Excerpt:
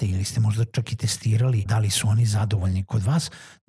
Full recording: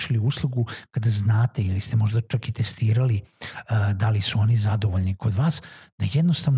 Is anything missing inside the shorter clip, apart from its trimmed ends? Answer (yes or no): yes